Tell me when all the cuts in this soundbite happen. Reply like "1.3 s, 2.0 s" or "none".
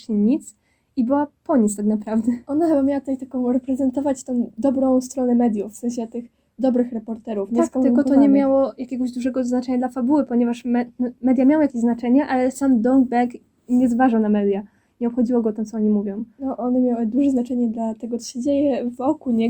none